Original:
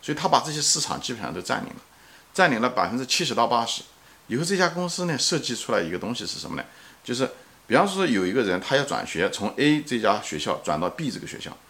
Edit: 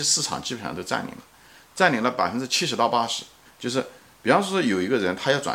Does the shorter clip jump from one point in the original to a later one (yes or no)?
yes